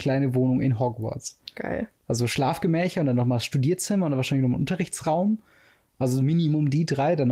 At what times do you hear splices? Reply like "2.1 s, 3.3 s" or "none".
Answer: none